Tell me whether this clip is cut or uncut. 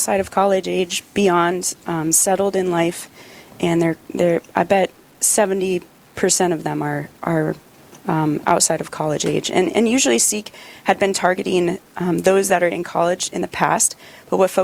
uncut